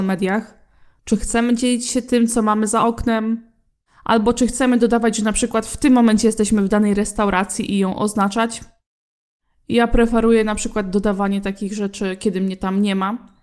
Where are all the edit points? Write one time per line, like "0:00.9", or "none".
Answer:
none

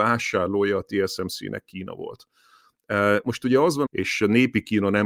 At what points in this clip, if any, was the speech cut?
0:03.9

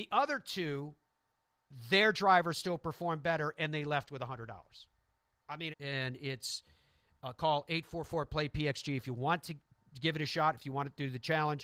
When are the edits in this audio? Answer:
0:05.7

